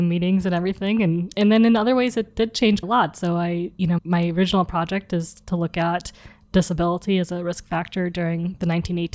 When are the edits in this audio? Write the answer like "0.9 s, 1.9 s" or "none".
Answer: 1.3 s, 2.8 s, 4.0 s